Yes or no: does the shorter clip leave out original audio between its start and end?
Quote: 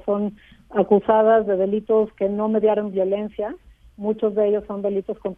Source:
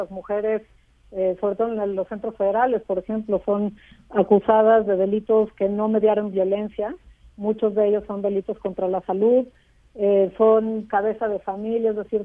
no